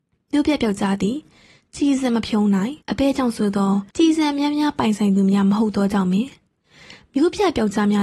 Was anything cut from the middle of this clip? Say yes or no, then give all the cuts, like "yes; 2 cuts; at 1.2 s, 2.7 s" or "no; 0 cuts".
yes; 2 cuts; at 2.8 s, 3.9 s